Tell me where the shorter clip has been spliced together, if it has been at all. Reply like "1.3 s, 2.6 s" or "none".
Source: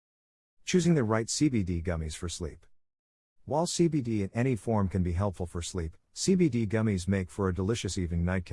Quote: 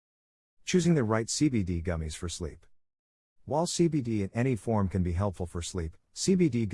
none